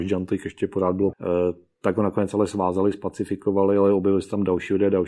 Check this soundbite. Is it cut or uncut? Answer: cut